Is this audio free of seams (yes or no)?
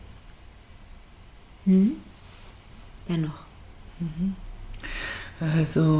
yes